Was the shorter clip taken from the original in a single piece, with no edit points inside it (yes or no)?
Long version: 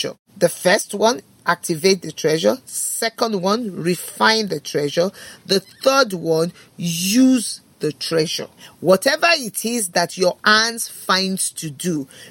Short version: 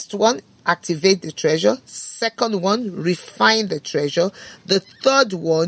yes